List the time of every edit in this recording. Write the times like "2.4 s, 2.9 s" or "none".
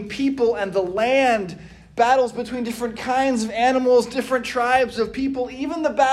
none